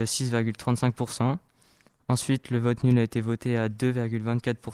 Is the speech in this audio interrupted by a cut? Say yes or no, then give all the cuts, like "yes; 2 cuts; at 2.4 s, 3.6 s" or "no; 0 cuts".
no; 0 cuts